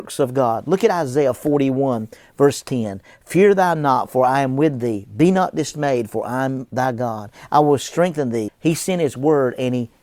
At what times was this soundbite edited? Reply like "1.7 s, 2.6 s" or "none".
8.5 s